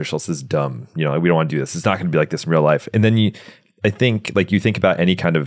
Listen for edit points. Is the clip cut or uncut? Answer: uncut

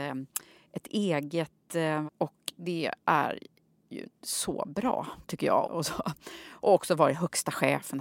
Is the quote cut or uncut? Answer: cut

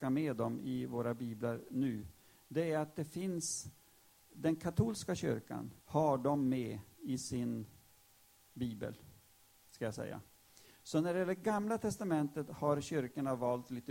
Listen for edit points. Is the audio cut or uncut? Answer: cut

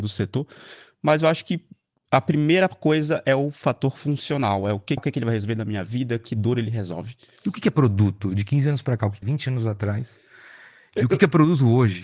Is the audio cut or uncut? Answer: cut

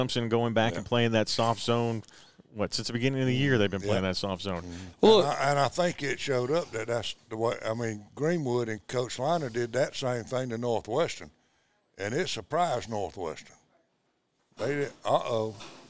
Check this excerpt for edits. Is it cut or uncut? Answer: cut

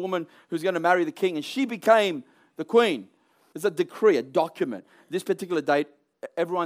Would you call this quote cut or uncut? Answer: cut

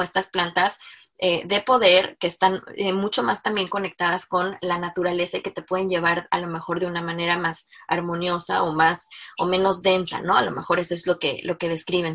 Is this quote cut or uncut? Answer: uncut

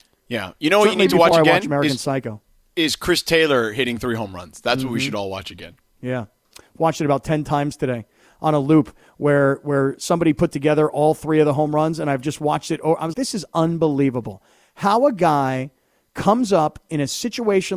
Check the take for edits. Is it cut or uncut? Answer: cut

